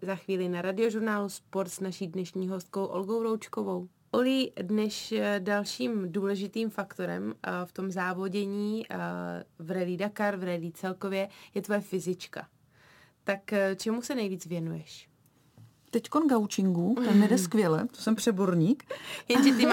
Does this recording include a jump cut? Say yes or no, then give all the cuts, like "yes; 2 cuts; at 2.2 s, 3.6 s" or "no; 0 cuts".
no; 0 cuts